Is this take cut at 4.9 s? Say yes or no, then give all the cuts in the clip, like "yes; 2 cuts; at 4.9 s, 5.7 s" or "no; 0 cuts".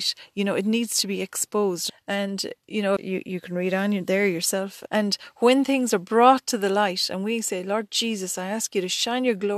yes; 3 cuts; at 1.9 s, 3.0 s, 4.9 s